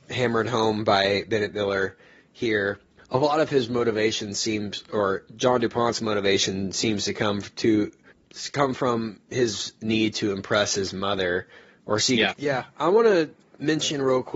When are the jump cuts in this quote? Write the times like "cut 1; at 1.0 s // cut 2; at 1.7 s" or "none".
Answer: cut 1; at 12.3 s